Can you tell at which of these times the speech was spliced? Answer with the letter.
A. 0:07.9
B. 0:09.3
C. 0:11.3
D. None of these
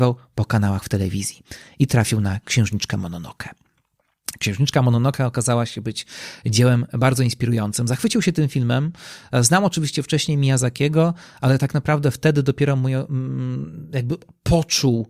D